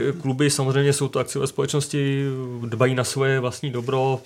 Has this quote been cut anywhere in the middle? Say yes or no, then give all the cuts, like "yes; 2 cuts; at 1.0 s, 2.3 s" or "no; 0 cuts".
no; 0 cuts